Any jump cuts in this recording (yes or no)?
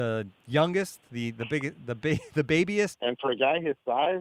yes